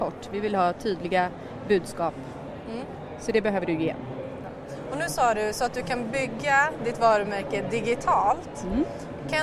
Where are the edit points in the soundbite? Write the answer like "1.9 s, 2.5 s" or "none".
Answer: none